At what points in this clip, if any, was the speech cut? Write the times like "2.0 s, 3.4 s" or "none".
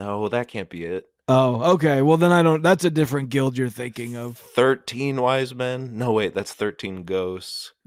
none